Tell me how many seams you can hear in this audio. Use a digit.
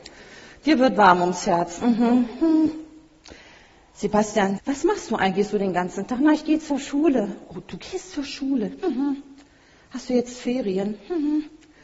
1